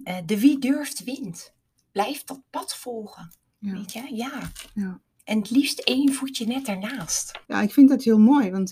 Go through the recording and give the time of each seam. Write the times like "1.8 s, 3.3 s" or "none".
7.5 s